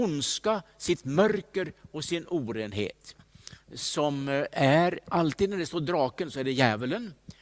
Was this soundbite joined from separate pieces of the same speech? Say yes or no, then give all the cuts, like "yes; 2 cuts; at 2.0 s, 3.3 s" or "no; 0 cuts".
yes; 1 cut; at 3.6 s